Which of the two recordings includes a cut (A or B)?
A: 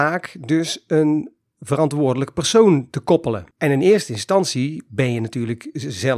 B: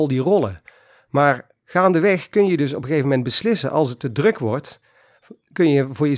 A